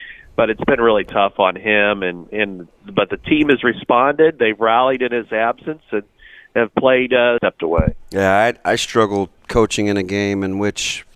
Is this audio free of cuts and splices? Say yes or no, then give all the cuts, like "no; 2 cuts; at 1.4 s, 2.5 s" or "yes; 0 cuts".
no; 2 cuts; at 7.4 s, 9.4 s